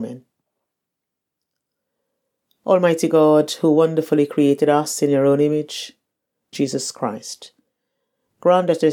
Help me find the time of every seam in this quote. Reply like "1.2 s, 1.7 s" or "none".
6.5 s